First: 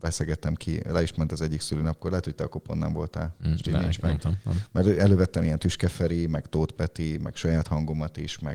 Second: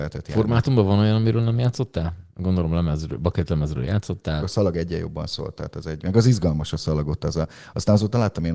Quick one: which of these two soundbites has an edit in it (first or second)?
second